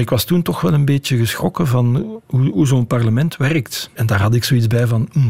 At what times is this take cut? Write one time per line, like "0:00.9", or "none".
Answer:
0:04.0